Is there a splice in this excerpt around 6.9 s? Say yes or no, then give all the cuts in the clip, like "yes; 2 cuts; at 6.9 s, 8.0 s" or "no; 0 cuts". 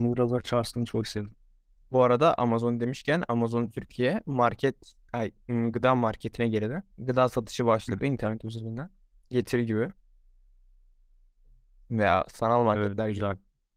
yes; 1 cut; at 6.9 s